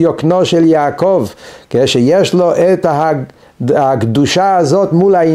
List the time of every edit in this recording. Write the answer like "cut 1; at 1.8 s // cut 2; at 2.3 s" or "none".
none

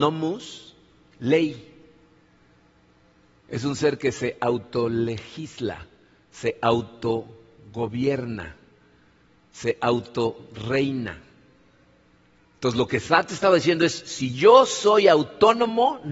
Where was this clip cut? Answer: none

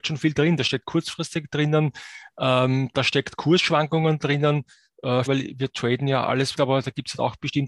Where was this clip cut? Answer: cut 1; at 5.3 s // cut 2; at 6.5 s

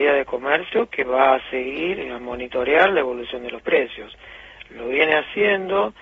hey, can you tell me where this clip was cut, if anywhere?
none

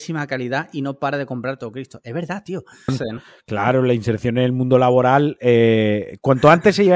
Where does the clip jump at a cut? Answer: cut 1; at 2.9 s

